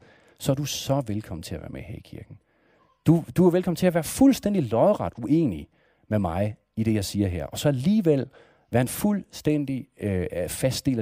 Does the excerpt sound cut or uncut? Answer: uncut